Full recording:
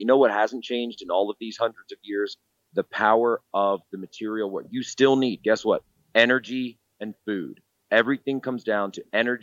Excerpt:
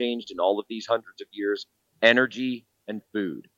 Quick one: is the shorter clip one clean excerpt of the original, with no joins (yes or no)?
no